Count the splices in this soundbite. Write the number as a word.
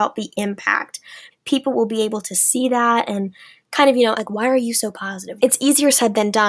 three